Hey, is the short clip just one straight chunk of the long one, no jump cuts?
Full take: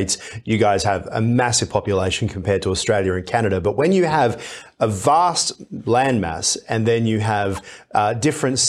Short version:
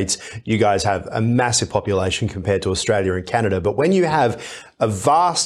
yes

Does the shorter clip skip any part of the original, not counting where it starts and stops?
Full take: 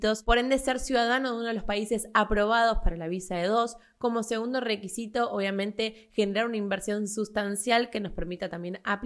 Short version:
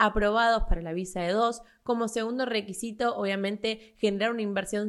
no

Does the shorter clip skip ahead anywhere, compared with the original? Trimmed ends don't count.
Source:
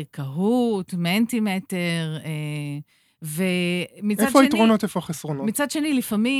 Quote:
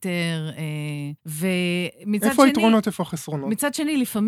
yes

